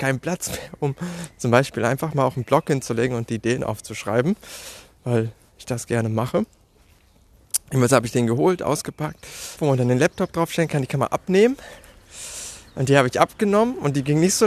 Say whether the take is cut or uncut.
cut